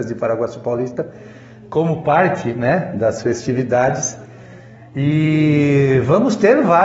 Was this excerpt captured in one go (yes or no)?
yes